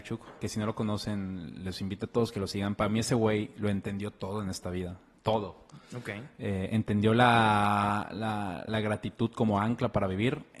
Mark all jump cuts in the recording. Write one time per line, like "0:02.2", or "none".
0:08.7